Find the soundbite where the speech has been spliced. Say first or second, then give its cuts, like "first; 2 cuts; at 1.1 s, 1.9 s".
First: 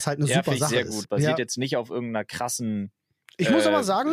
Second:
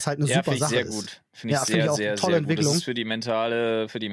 first; 1 cut; at 1.0 s